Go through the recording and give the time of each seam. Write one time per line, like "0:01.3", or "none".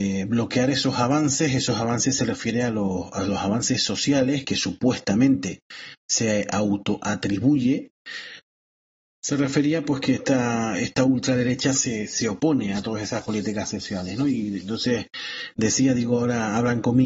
0:04.4